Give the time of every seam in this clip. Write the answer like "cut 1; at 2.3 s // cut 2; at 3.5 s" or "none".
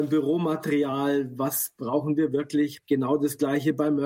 cut 1; at 2.8 s